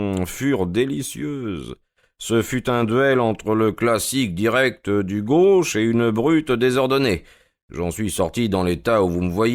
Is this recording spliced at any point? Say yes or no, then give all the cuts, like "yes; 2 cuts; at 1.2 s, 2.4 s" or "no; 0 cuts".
no; 0 cuts